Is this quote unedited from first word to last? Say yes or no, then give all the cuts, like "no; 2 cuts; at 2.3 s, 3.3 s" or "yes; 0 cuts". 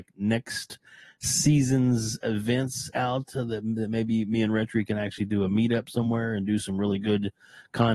yes; 0 cuts